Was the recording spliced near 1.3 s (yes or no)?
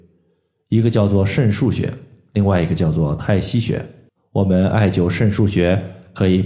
no